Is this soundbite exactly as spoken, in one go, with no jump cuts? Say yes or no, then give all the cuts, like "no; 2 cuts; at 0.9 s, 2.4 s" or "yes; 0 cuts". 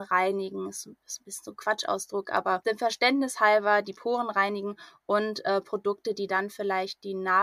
yes; 0 cuts